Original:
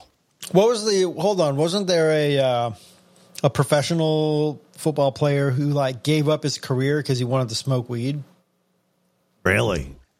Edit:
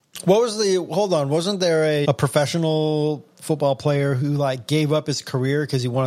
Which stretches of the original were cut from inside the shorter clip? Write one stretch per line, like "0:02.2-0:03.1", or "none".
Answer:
0:02.3-0:03.4